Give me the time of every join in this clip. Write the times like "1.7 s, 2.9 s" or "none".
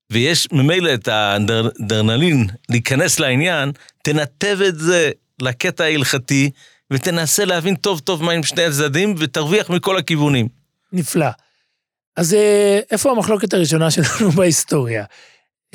none